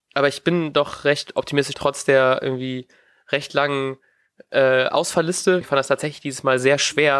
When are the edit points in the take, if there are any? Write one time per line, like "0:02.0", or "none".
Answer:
0:01.7
0:05.6